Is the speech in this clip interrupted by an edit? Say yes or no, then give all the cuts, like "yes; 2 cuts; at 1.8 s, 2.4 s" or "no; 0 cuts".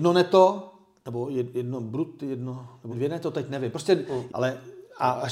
yes; 2 cuts; at 2.9 s, 4.3 s